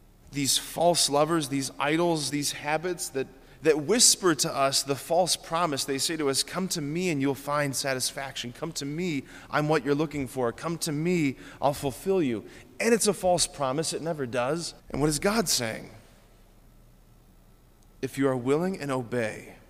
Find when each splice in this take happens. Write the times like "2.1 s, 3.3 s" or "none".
2.3 s, 14.8 s

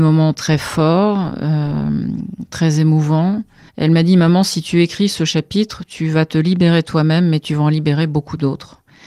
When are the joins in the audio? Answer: 3.7 s

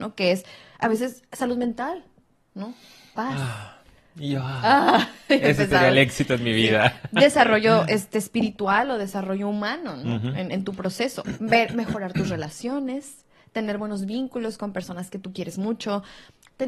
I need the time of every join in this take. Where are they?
none

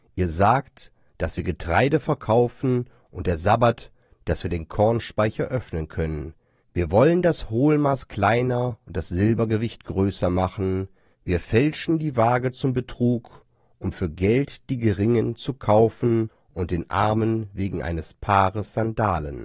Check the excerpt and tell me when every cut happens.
1.1 s

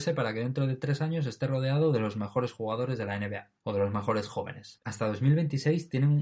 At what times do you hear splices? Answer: 3.6 s, 4.8 s

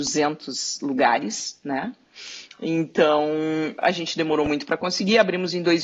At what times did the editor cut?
none

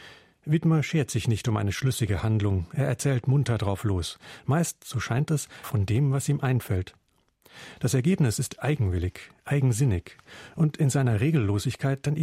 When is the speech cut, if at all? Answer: 5.6 s

